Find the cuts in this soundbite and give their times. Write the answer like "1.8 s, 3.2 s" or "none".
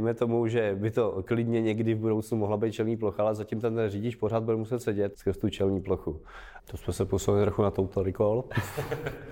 5.1 s, 6.6 s